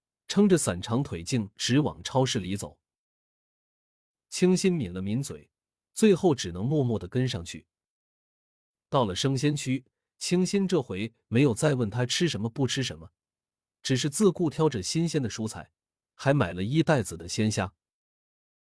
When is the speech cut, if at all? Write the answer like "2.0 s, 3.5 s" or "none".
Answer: none

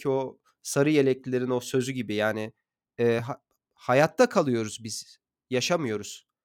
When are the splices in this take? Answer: none

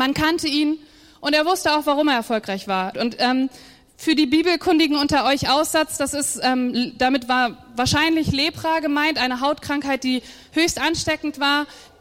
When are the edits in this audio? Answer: 2.9 s

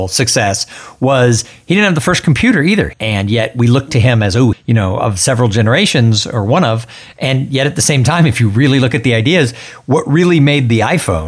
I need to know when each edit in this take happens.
2.9 s, 4.5 s

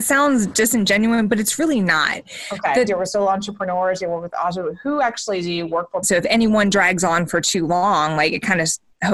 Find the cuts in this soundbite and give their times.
2.9 s, 6.0 s

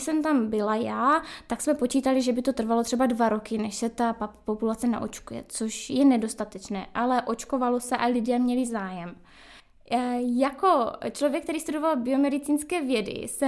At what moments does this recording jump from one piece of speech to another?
none

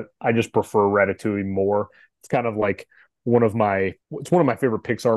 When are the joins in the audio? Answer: 4.0 s

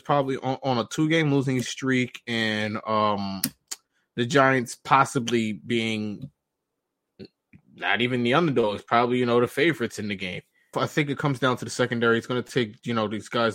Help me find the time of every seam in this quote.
10.7 s

